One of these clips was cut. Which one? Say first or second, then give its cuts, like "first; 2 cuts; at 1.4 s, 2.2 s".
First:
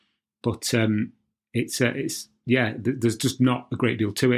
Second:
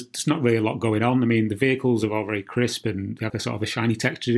second; 1 cut; at 3.3 s